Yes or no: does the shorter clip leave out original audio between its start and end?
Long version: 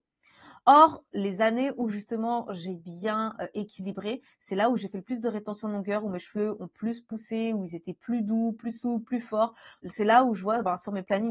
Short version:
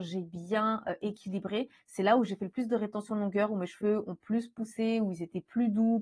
no